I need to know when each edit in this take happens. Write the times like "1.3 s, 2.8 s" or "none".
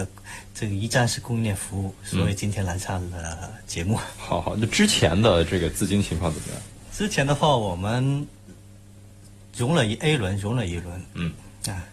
none